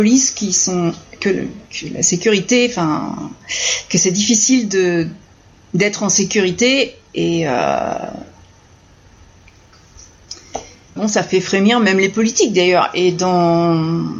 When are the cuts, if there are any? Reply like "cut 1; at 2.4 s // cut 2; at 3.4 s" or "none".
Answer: cut 1; at 1.7 s // cut 2; at 11.0 s